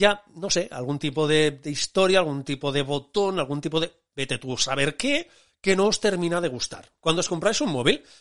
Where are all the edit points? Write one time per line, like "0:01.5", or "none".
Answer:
0:07.0

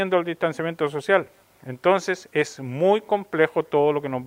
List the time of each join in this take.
none

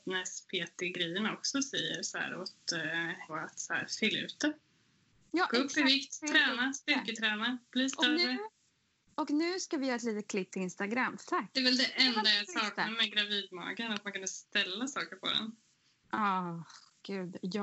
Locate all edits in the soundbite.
0:03.3
0:11.2

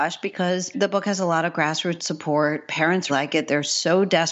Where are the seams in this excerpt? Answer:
0:03.1

